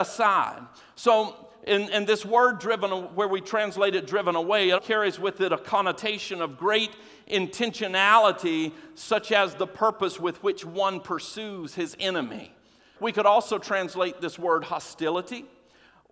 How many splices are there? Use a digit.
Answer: 2